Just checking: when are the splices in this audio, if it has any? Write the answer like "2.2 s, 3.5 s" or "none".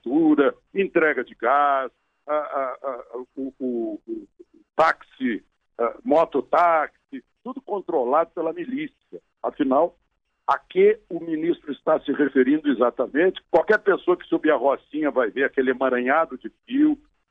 9.3 s, 13.4 s